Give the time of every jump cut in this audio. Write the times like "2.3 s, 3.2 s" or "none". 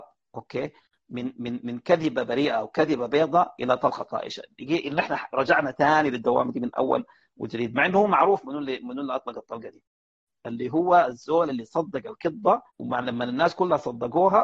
12.7 s